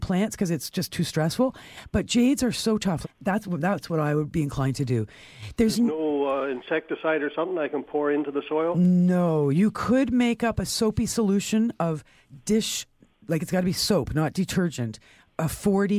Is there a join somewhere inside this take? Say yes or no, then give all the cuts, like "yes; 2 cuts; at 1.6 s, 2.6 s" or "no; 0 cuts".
yes; 1 cut; at 3.0 s